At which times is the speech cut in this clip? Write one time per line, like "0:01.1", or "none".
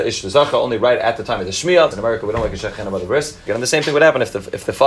0:01.9
0:03.5

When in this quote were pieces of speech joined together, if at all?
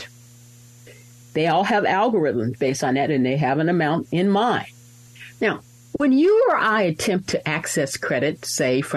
0:01.2
0:05.3

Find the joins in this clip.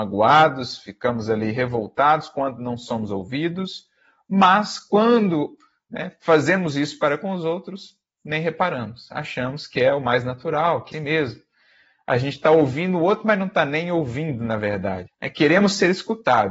0:10.9
0:15.1

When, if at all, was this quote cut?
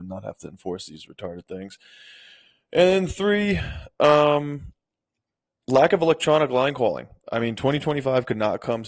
none

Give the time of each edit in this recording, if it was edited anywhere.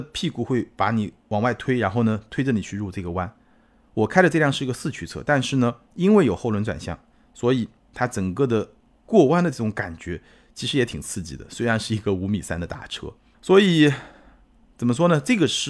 none

